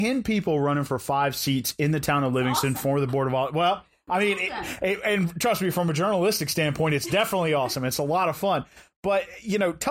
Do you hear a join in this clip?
no; 0 cuts

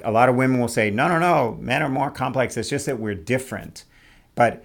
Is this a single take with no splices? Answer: yes; 0 cuts

